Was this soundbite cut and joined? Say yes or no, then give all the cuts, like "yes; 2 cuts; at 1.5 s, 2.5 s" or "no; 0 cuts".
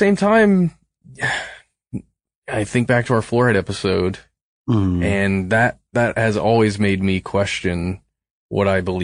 no; 0 cuts